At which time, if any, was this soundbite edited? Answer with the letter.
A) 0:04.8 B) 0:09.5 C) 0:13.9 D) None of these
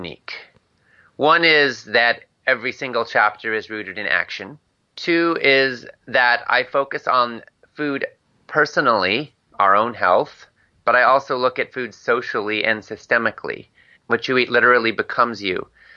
C